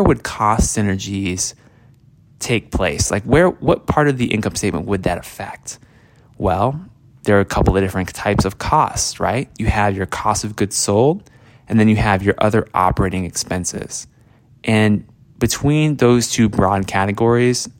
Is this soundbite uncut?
yes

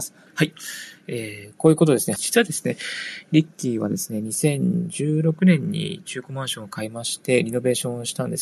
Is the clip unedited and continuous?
no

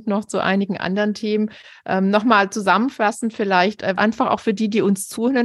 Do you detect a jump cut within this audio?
yes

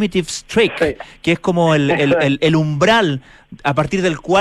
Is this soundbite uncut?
yes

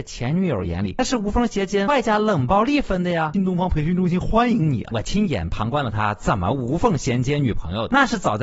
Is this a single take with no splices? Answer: no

